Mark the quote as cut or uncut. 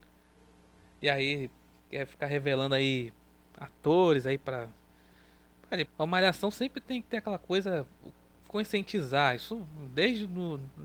cut